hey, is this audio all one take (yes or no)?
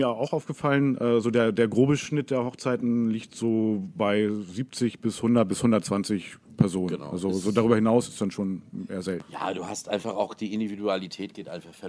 yes